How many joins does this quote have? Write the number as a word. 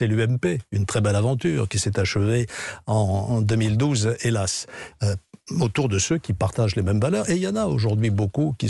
one